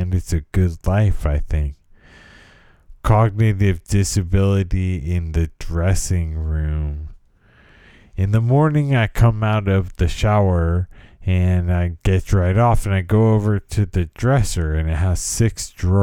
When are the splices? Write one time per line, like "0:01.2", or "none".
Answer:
none